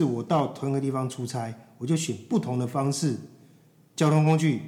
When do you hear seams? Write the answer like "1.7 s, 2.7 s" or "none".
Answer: none